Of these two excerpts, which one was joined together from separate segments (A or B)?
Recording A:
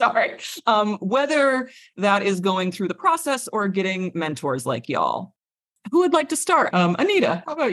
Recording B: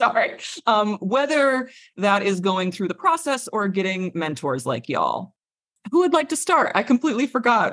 A